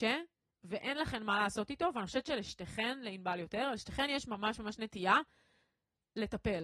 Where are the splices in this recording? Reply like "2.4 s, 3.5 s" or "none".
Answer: none